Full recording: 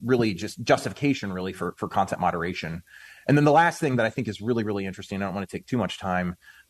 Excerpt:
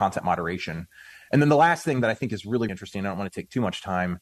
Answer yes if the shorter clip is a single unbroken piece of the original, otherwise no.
no